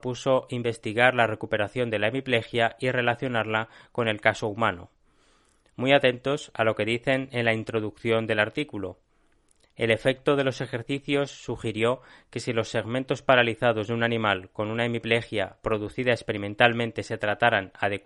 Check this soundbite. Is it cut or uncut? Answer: uncut